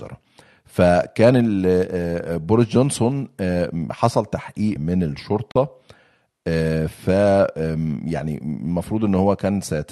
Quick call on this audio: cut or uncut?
cut